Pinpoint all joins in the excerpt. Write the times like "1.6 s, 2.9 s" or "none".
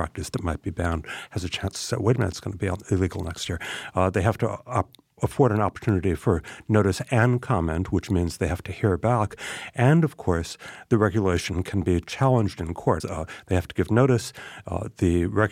13.0 s